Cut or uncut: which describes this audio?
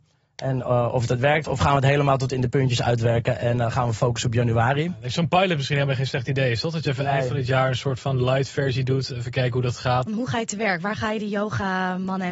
cut